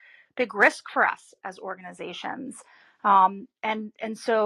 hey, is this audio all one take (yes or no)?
yes